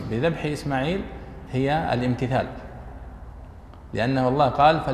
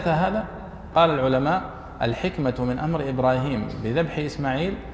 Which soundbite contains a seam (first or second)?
second